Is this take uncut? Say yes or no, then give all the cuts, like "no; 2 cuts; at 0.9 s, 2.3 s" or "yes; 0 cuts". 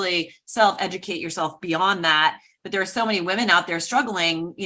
yes; 0 cuts